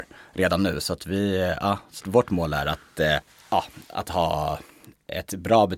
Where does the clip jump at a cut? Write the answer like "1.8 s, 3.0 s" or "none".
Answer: 2.0 s